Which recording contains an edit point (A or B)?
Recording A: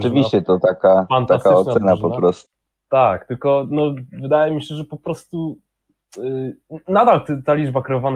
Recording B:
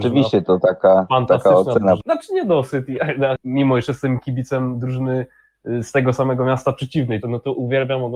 B